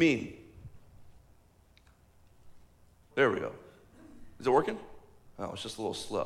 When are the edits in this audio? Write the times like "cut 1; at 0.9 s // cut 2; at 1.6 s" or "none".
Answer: cut 1; at 3.1 s